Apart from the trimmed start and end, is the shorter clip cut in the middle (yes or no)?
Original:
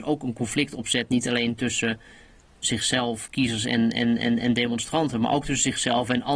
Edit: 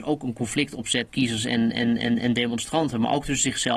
yes